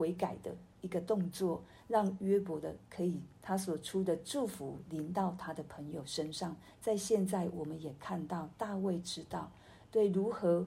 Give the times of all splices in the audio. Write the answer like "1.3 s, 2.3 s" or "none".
3.4 s